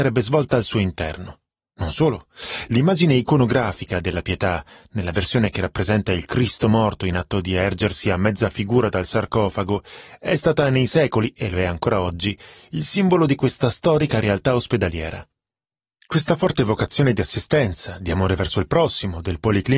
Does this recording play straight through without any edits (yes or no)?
yes